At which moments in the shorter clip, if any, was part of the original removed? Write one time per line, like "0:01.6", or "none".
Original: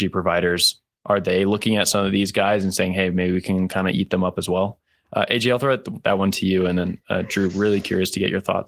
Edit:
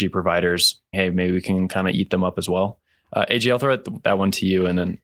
0:00.9